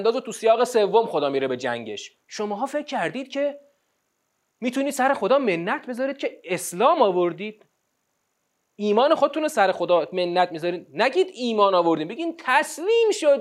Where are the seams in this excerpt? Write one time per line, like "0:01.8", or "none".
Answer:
0:02.2